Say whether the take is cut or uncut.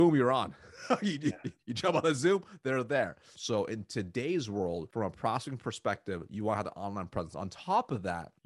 cut